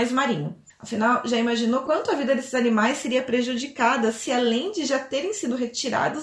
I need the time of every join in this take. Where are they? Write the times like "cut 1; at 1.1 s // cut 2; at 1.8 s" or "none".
none